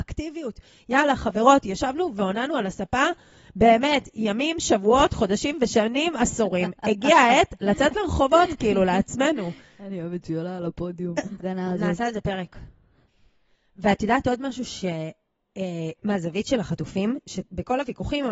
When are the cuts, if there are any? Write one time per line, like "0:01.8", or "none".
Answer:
0:11.4
0:15.9